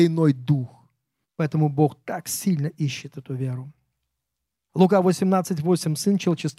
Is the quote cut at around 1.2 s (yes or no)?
yes